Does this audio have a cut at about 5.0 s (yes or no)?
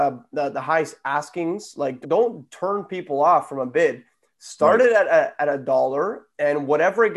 no